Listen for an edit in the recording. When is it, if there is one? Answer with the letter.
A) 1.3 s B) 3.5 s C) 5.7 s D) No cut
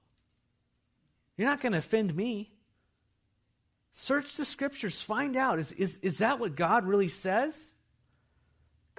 D